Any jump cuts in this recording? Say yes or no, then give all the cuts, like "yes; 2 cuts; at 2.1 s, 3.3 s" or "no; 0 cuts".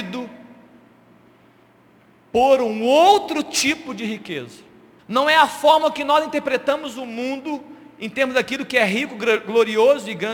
yes; 1 cut; at 5.0 s